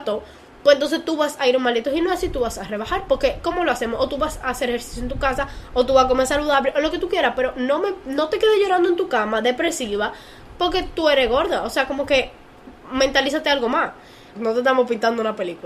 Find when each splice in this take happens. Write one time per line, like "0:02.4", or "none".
0:14.4